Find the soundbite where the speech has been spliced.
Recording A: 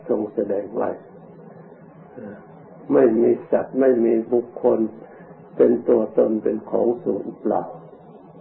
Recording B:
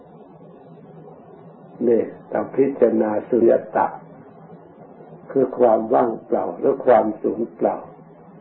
B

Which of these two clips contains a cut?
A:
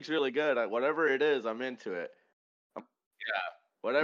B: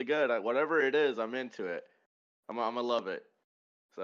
A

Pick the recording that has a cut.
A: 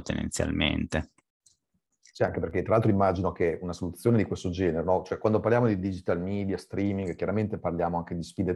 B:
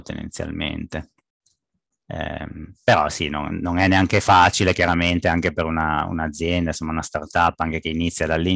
B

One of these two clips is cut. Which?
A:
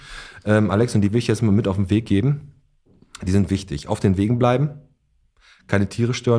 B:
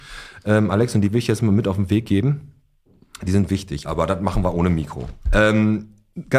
B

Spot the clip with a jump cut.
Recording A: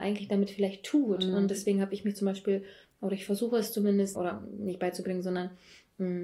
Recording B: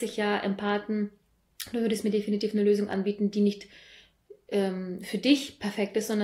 A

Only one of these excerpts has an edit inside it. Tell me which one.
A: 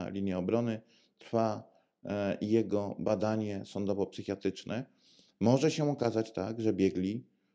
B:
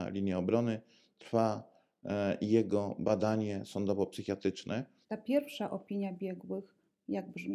B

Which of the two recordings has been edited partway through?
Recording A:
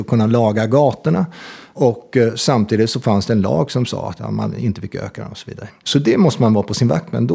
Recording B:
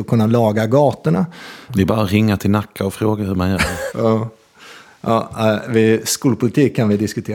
B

